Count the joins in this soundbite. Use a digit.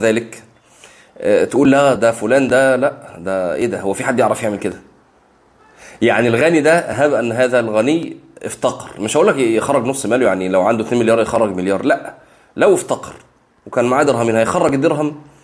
1